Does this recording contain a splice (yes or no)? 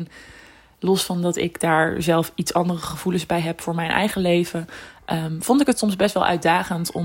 no